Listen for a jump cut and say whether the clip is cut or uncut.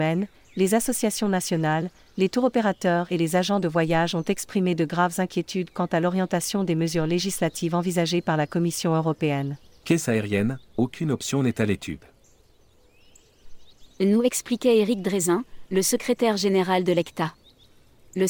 cut